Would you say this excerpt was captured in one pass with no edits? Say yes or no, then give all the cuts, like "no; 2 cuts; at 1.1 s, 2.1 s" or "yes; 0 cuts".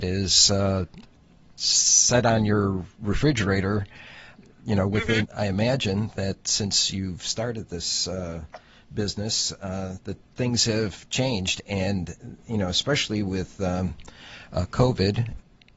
no; 1 cut; at 5.2 s